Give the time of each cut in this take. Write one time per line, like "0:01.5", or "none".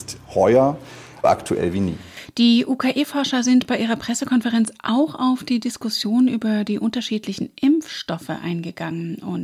0:01.2